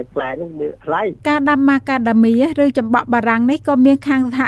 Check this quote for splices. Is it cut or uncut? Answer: cut